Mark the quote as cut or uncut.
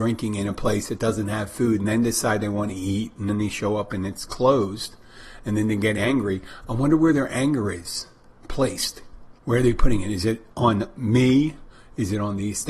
cut